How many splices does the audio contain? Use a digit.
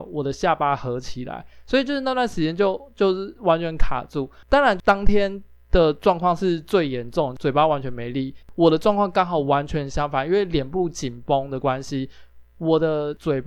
1